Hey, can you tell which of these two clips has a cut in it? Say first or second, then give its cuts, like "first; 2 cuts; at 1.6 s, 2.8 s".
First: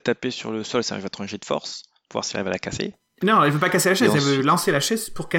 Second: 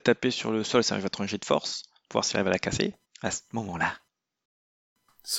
second; 1 cut; at 3.0 s